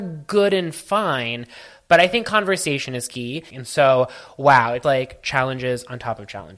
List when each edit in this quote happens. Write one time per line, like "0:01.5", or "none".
0:03.5
0:04.8